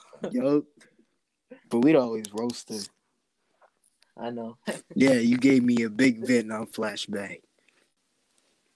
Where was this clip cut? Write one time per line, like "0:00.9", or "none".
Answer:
0:01.6
0:04.6